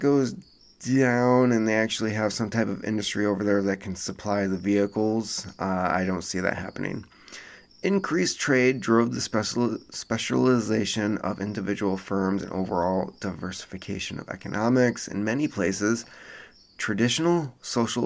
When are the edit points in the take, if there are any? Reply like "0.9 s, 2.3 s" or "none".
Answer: none